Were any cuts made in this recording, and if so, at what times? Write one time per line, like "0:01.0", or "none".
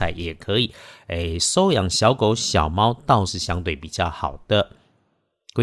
0:03.3